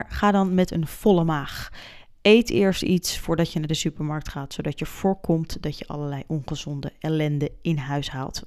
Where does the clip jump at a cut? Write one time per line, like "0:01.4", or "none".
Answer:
none